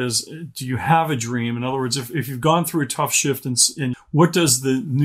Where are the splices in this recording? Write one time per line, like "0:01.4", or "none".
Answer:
0:03.9